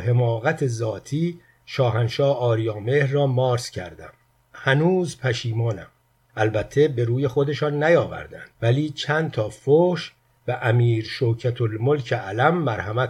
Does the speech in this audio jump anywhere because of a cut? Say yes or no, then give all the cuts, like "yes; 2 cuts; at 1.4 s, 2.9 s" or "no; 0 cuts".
yes; 2 cuts; at 6.3 s, 8.5 s